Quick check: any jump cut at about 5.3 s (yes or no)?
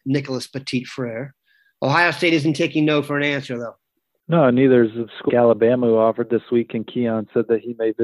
yes